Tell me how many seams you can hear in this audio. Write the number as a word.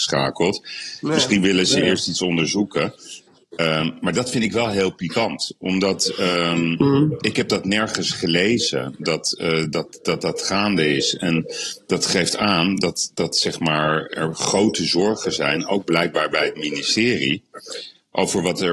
zero